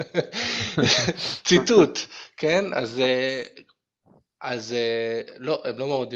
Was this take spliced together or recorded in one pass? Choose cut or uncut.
uncut